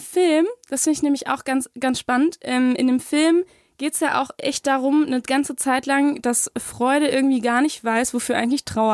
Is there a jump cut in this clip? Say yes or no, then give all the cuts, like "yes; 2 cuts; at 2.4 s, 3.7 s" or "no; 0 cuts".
no; 0 cuts